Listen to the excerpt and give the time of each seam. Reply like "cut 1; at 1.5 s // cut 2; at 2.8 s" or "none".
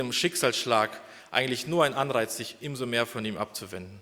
none